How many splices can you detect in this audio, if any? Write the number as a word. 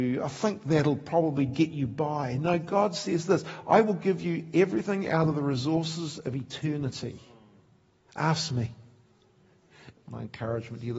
one